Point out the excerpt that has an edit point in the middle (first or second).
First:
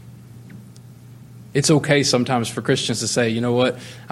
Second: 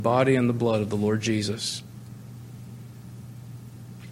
first